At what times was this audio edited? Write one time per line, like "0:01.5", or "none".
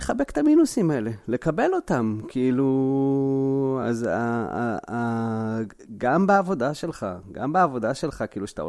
none